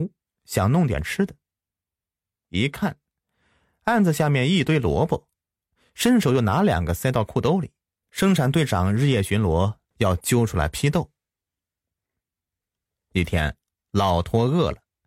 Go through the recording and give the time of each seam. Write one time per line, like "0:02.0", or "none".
0:08.0
0:09.9